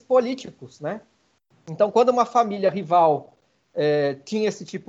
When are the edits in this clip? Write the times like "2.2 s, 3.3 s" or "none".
none